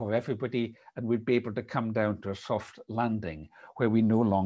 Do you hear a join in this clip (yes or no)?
no